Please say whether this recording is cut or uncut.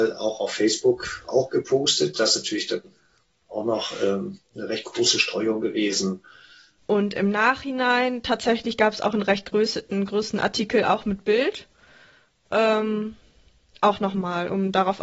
cut